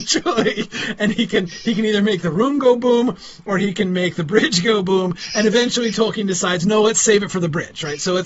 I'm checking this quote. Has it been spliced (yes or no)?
no